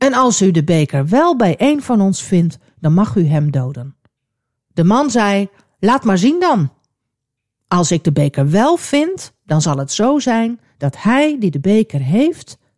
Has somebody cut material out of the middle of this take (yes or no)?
no